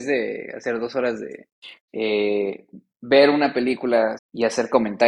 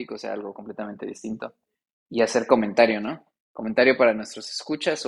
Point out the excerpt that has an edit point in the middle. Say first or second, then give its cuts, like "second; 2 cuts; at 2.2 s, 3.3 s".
first; 2 cuts; at 1.9 s, 4.2 s